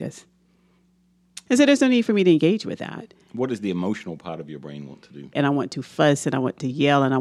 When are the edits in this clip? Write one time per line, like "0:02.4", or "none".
0:01.5
0:05.3